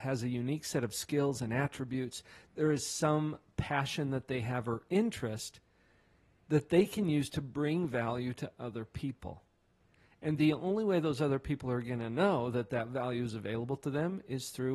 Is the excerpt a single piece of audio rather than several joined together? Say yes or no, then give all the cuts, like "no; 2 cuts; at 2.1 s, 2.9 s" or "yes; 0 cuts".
yes; 0 cuts